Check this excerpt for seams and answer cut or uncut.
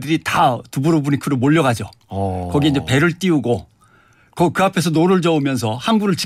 uncut